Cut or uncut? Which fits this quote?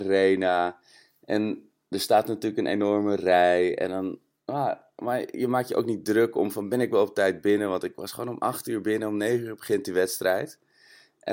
uncut